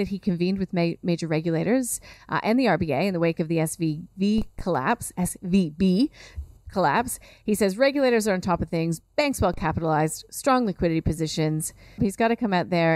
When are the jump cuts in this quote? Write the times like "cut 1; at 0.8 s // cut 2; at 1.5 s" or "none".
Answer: cut 1; at 12.0 s